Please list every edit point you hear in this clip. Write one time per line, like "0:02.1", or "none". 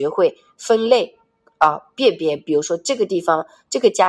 none